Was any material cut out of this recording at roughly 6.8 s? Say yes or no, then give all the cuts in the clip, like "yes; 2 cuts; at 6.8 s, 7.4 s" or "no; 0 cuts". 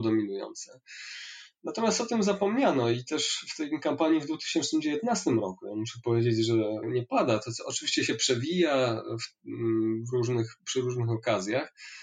yes; 1 cut; at 6.8 s